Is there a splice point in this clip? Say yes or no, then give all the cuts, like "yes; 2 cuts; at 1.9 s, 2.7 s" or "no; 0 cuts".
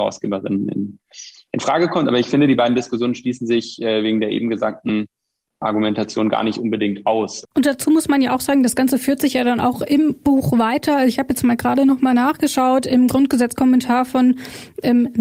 no; 0 cuts